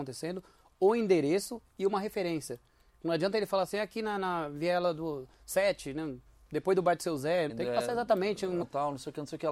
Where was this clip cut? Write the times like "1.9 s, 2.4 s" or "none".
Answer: 7.5 s, 8.6 s